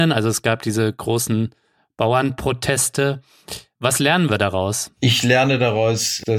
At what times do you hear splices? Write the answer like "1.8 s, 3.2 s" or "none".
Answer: none